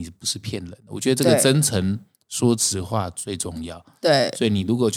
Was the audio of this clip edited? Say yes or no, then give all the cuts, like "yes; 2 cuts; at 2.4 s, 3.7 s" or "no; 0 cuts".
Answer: no; 0 cuts